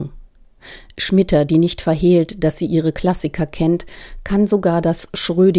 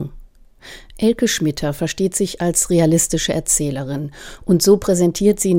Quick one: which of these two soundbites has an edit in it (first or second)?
second